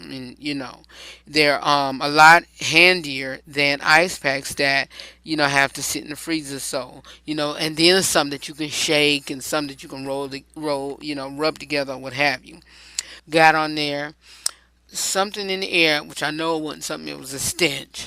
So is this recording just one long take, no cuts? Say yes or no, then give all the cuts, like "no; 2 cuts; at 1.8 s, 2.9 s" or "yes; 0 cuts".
no; 1 cut; at 13.2 s